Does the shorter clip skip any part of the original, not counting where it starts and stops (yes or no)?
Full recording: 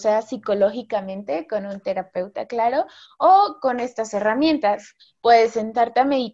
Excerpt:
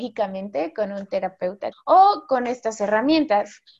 yes